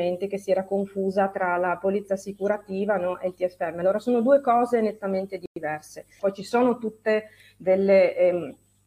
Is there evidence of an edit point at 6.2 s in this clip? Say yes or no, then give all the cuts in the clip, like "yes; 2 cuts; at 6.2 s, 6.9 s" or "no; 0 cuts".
yes; 1 cut; at 6.2 s